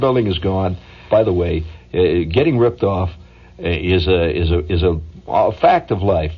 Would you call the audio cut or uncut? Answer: cut